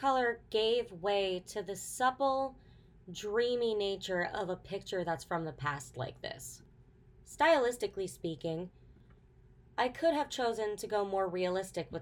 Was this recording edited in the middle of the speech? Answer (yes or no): no